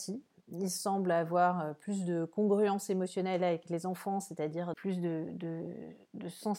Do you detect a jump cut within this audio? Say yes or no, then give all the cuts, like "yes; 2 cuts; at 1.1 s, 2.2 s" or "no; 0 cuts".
no; 0 cuts